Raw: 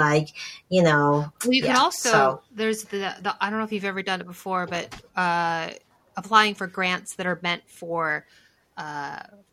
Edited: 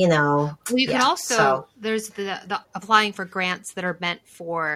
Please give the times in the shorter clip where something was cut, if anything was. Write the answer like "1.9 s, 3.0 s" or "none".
2.6 s